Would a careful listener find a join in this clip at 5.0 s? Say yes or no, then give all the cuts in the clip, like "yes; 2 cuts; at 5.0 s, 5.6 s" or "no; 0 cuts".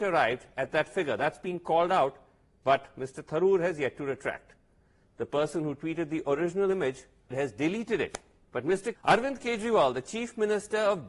yes; 3 cuts; at 5.0 s, 7.3 s, 9.0 s